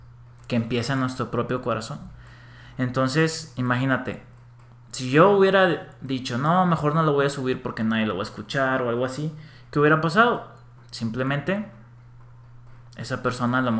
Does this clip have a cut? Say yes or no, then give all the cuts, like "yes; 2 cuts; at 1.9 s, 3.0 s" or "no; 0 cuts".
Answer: no; 0 cuts